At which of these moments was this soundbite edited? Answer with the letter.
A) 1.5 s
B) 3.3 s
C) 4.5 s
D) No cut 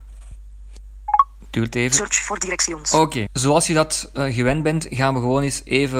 B